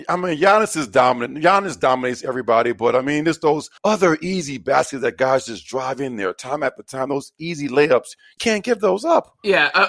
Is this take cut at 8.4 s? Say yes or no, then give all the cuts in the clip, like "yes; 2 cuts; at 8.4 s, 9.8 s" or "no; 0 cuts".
yes; 2 cuts; at 3.8 s, 8.4 s